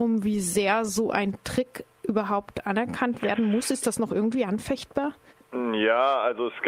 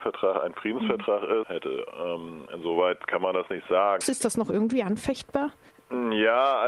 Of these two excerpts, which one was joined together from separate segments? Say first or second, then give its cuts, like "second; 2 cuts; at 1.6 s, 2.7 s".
second; 2 cuts; at 1.4 s, 4.0 s